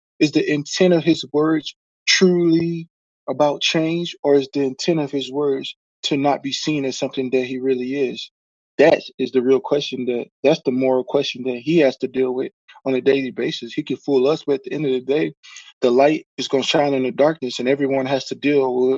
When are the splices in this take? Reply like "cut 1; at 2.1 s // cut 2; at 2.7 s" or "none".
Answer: cut 1; at 15.7 s